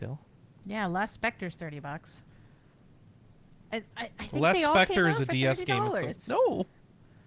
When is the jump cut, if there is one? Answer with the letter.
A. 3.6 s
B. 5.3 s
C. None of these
C